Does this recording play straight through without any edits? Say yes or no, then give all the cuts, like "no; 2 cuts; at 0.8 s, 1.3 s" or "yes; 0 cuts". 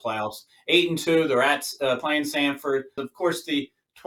no; 1 cut; at 3.0 s